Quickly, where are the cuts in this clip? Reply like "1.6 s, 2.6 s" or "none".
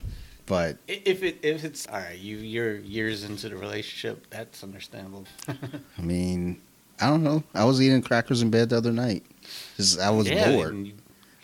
1.8 s, 5.3 s

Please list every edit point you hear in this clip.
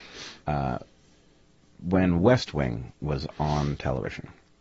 none

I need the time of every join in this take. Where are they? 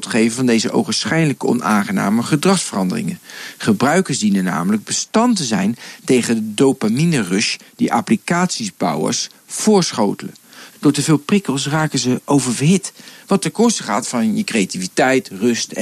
10.7 s

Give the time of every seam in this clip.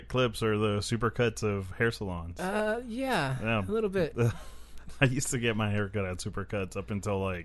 none

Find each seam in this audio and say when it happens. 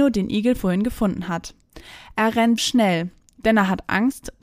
2.6 s

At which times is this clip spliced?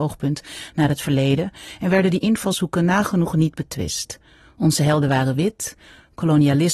none

